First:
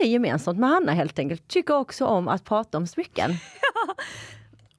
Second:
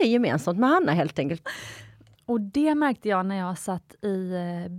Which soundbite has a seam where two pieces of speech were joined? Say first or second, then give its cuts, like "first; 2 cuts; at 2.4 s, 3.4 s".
second; 1 cut; at 1.4 s